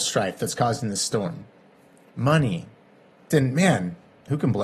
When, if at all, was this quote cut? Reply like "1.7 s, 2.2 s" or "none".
3.3 s